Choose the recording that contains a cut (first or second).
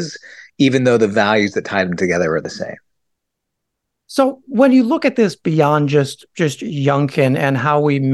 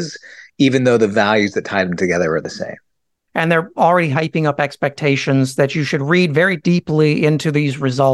second